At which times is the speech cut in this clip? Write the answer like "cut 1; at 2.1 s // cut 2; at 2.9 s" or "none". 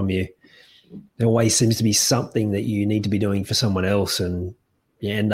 cut 1; at 1.1 s

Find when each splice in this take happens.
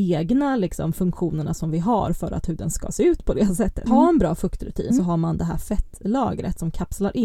cut 1; at 3.9 s // cut 2; at 4.9 s

